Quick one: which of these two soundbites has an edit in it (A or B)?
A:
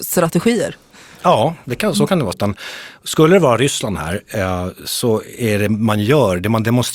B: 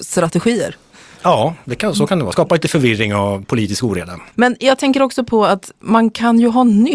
A